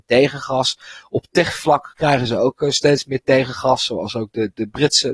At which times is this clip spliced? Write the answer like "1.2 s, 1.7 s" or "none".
none